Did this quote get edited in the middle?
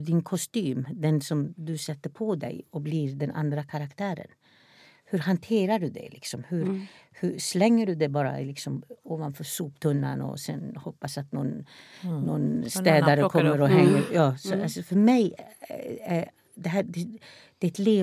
no; 0 cuts

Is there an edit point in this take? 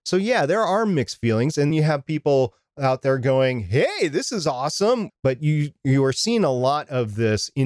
yes; 2 cuts; at 1.7 s, 5.1 s

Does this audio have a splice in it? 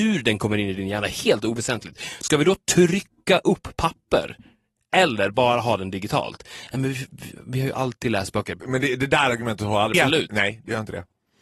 yes; 2 cuts; at 8.6 s, 9.9 s

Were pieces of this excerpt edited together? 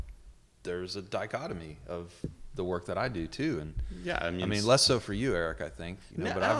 no; 0 cuts

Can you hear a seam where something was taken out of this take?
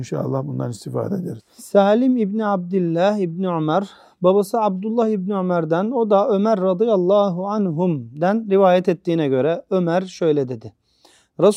no; 0 cuts

